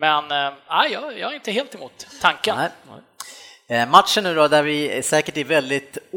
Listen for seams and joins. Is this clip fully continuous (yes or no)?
yes